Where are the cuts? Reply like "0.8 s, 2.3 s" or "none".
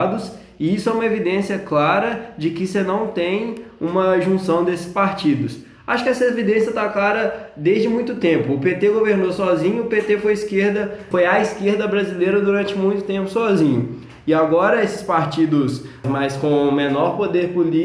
11.1 s, 16.0 s